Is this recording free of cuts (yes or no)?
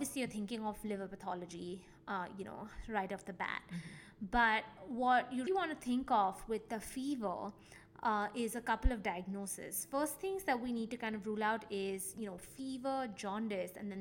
no